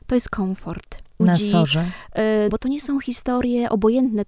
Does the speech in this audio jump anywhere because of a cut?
yes; 2 cuts; at 1.2 s, 2.5 s

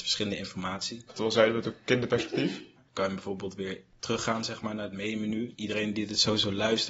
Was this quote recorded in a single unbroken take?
no; 3 cuts; at 1.1 s, 2.8 s, 5.5 s

